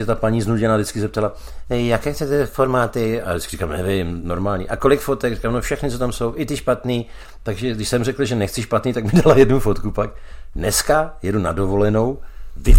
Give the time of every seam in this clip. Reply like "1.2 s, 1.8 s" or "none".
none